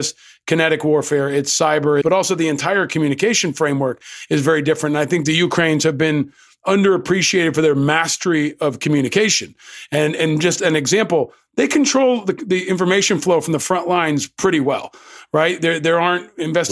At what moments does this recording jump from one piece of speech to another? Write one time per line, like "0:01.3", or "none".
0:02.0